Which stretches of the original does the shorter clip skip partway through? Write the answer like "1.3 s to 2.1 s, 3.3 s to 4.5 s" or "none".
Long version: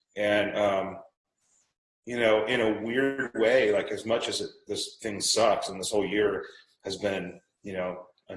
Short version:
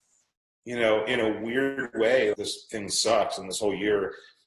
3.7 s to 4.6 s